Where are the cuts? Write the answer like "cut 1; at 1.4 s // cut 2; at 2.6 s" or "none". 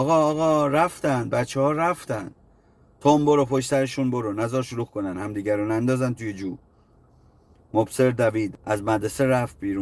none